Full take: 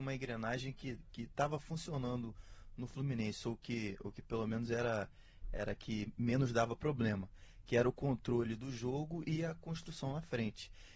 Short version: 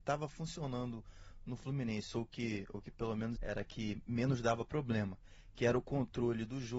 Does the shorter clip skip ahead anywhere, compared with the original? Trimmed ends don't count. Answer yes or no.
yes